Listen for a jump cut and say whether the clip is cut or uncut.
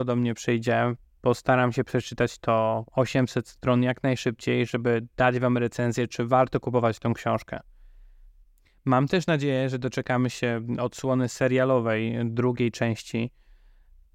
uncut